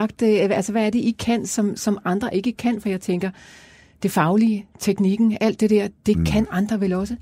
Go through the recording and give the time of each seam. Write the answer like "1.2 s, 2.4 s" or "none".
none